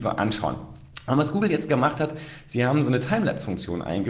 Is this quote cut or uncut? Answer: uncut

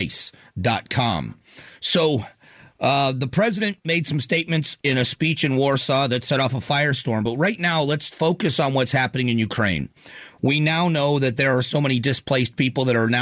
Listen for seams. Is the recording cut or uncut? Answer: uncut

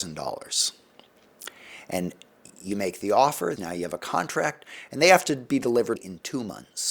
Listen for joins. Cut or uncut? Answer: cut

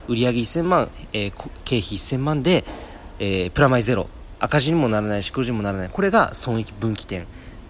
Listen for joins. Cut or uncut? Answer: uncut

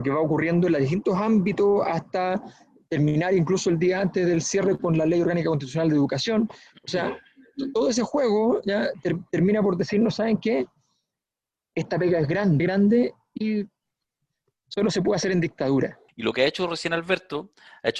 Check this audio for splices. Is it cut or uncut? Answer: cut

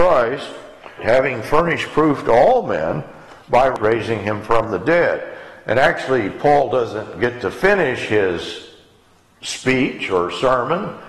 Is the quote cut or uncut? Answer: cut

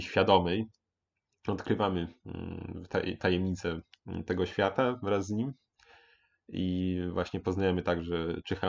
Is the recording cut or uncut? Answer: uncut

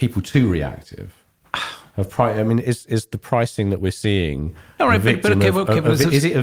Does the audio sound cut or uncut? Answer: uncut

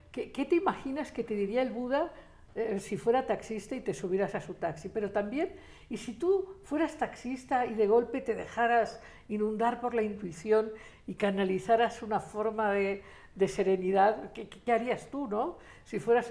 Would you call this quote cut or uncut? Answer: uncut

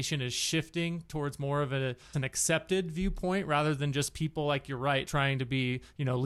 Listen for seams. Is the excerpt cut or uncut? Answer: cut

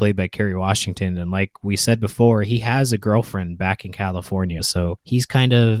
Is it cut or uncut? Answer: uncut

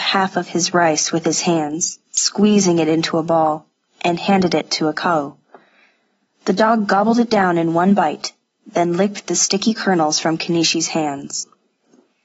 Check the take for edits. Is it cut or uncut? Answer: uncut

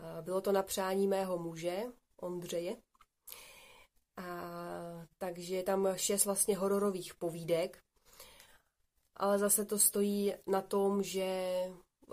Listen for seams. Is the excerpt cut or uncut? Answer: uncut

